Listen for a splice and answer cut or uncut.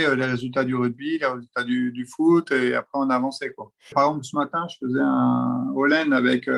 cut